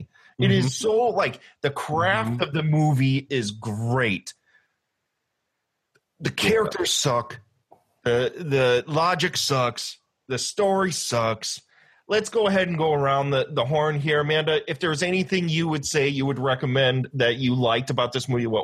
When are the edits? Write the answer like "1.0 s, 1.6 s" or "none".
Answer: none